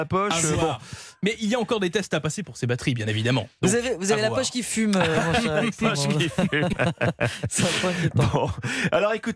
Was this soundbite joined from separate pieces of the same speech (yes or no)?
no